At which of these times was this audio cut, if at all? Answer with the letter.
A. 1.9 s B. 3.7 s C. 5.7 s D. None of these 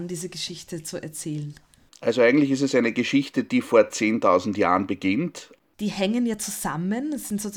C